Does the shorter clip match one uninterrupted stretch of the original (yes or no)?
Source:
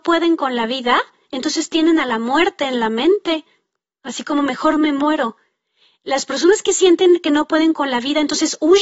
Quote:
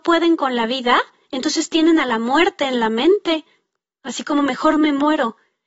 yes